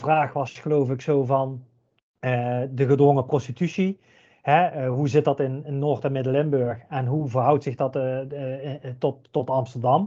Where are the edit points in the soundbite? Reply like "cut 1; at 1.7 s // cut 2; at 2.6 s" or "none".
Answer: none